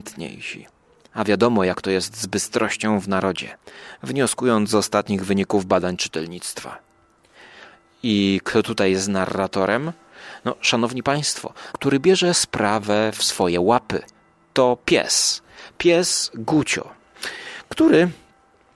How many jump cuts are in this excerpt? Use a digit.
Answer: 1